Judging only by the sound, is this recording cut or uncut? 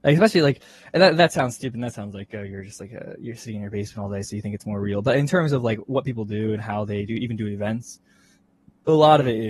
uncut